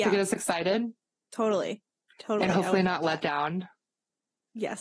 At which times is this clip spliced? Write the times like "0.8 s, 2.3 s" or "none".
none

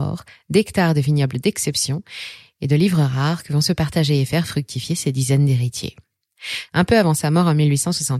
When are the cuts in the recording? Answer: 6.7 s

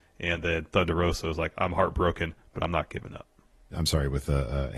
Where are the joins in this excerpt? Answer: 3.7 s

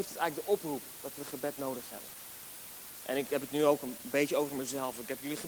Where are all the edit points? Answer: none

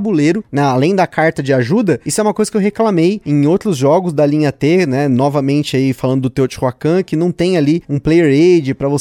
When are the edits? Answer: none

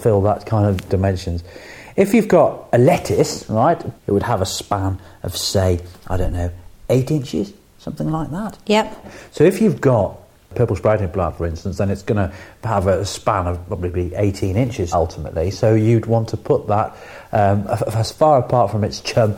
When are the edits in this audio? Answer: 4.0 s, 9.0 s, 14.9 s

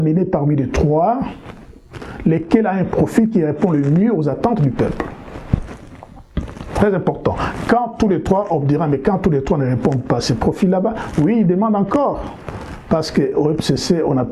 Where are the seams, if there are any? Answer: none

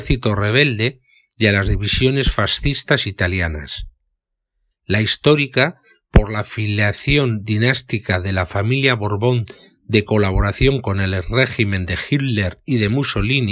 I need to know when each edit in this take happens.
4.7 s

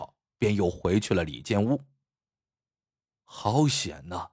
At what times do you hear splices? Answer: none

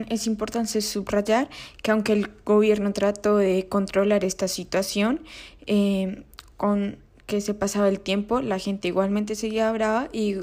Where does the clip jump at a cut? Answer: none

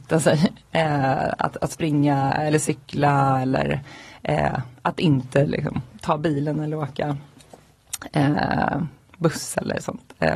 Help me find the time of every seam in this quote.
none

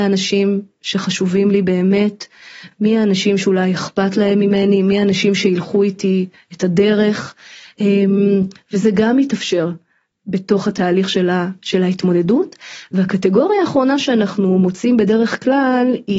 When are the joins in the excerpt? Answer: none

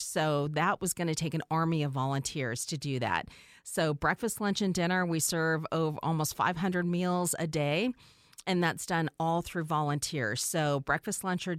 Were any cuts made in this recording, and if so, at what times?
none

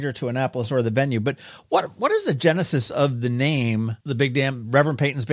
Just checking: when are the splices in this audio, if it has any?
4.0 s

